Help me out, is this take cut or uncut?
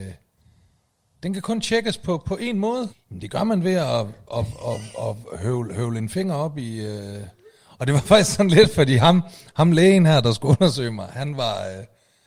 cut